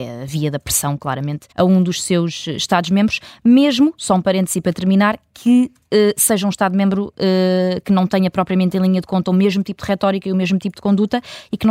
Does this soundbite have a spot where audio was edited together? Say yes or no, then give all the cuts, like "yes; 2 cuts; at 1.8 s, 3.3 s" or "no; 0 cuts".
yes; 1 cut; at 1.5 s